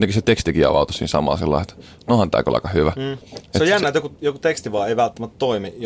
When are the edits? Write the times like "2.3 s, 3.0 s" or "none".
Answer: 3.3 s